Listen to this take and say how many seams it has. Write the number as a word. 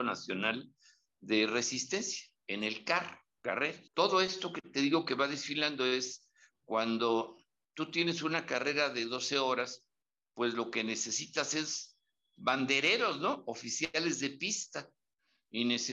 zero